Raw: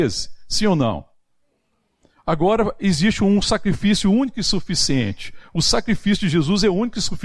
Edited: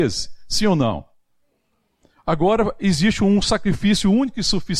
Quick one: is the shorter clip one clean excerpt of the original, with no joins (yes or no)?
yes